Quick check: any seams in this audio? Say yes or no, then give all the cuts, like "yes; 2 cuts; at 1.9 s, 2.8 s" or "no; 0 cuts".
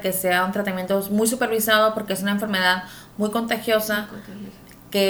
no; 0 cuts